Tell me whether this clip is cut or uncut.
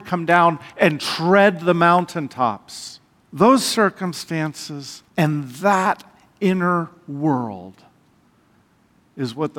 cut